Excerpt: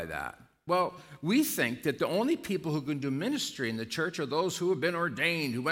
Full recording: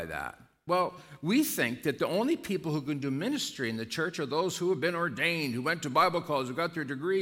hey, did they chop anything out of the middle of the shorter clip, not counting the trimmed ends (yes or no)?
no